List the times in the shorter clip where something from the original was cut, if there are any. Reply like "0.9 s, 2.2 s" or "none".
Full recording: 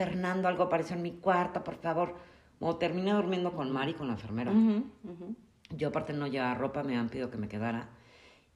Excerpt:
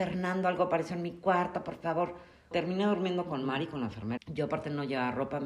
2.5 s, 4.2 s

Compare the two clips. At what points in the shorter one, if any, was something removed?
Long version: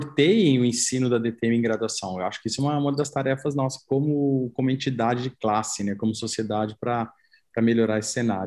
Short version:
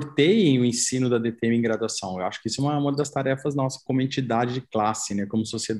3.9 s

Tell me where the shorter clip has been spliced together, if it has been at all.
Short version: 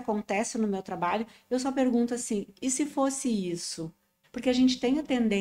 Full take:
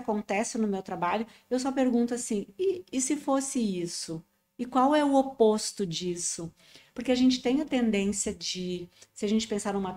2.5 s, 4.2 s

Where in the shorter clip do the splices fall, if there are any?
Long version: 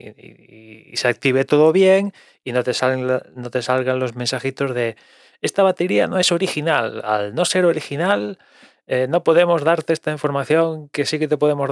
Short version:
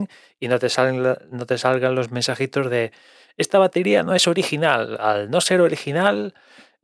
none

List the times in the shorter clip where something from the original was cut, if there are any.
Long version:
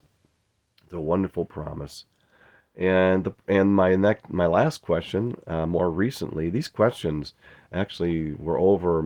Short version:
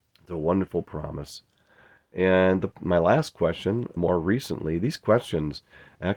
2.8 s, 4.0 s

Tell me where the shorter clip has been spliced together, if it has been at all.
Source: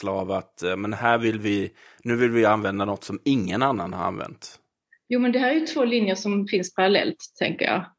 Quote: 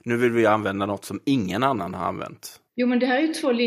2.7 s

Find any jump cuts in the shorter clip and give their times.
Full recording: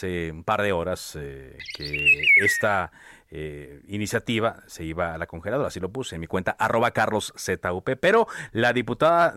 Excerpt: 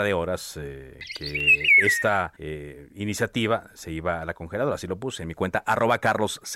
2.4 s

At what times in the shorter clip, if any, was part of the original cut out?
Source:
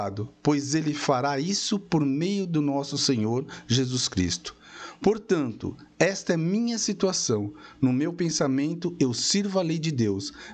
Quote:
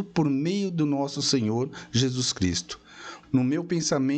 3.2 s

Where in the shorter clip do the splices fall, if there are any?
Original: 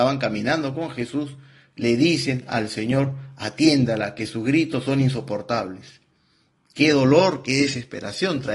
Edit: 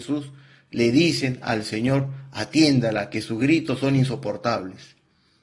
none

